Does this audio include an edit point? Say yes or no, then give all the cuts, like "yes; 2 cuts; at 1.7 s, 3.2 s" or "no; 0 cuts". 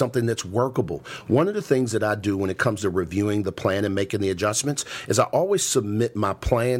no; 0 cuts